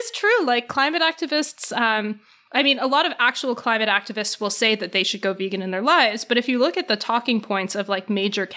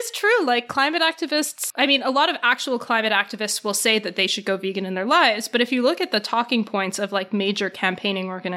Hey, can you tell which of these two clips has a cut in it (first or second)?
second